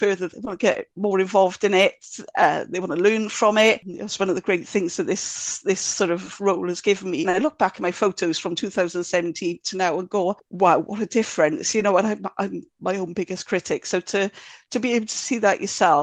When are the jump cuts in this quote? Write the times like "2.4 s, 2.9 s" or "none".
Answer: 7.2 s